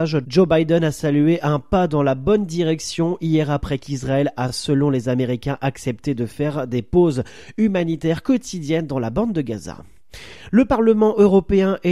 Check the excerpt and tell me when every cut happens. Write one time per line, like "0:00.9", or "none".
none

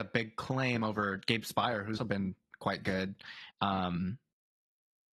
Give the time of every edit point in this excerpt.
0:02.0
0:03.5

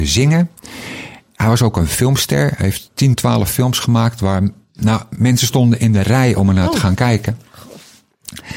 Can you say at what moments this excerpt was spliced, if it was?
none

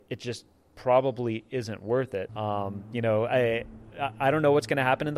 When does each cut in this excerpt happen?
0:02.3

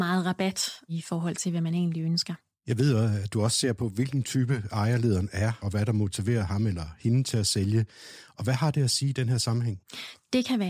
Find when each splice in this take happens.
none

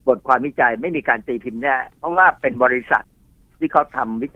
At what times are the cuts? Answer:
none

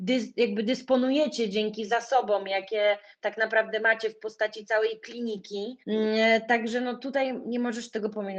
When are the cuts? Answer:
0:05.8

